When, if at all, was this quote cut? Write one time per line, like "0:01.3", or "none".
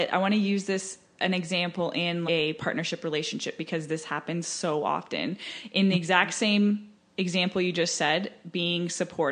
0:02.3